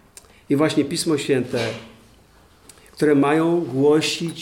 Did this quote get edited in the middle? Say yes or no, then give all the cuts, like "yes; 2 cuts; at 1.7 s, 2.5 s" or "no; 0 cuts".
no; 0 cuts